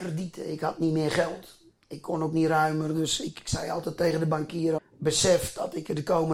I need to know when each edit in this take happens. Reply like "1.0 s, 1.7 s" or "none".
4.8 s